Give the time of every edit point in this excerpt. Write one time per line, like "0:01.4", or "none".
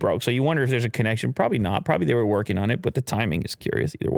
none